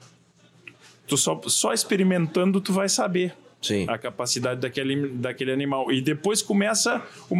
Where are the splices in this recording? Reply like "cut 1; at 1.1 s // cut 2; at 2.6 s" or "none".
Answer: none